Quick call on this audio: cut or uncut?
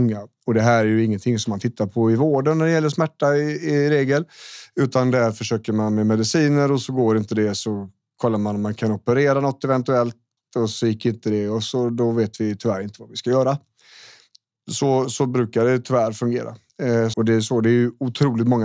cut